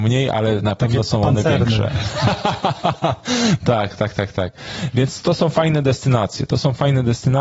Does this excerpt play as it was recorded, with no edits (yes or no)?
no